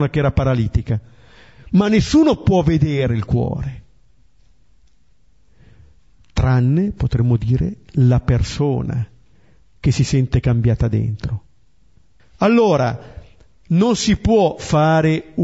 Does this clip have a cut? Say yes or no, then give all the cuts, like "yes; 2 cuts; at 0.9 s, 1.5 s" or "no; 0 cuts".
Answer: yes; 1 cut; at 12.2 s